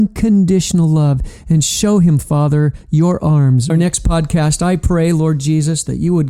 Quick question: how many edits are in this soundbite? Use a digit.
1